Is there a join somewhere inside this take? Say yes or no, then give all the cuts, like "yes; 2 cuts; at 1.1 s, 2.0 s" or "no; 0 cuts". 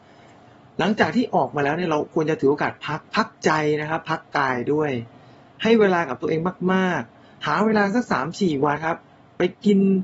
yes; 1 cut; at 8.8 s